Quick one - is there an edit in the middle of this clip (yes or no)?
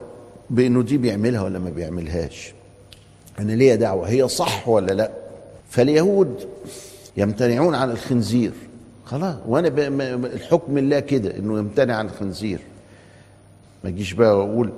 yes